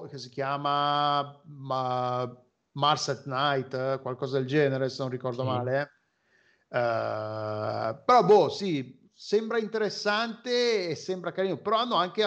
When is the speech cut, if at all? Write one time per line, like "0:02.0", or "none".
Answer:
none